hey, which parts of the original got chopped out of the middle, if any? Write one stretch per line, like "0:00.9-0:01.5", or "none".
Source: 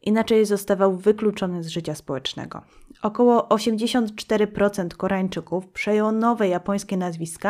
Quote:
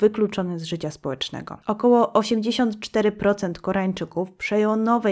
0:02.7-0:03.0